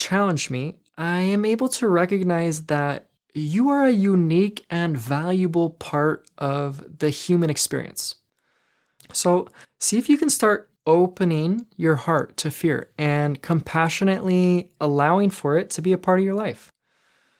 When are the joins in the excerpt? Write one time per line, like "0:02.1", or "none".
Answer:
0:09.0
0:10.8